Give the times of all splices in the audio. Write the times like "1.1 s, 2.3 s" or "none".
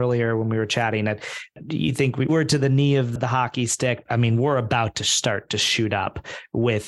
2.3 s, 4.1 s